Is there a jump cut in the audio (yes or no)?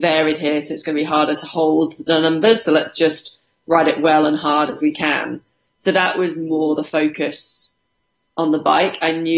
no